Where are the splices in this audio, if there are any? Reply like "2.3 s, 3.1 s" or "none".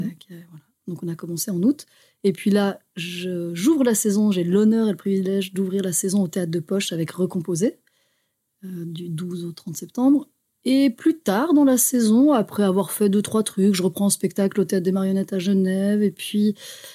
none